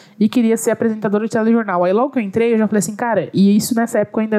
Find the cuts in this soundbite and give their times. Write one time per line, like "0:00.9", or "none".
none